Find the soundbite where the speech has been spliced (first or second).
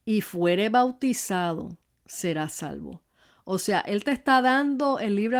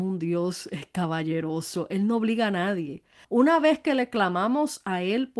second